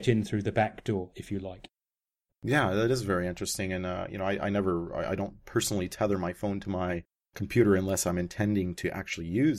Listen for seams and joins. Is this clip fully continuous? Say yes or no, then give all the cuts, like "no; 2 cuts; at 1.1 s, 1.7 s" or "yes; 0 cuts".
no; 1 cut; at 1.1 s